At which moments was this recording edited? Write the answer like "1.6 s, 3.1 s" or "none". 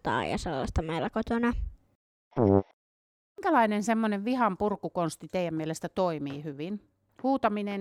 none